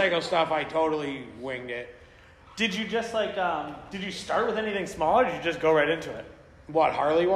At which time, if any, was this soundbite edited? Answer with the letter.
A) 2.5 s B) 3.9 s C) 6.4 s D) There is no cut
D